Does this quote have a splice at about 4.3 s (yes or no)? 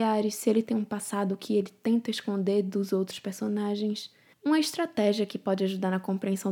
yes